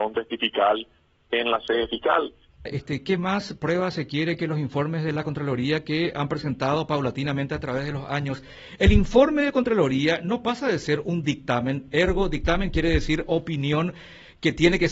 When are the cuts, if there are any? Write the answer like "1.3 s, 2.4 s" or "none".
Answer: 2.7 s